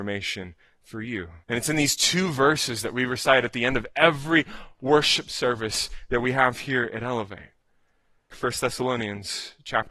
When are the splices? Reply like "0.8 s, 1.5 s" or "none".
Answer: 1.4 s, 8.3 s